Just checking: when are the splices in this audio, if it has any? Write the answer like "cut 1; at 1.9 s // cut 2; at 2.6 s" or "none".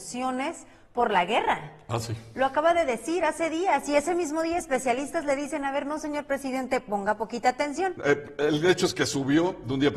cut 1; at 8.0 s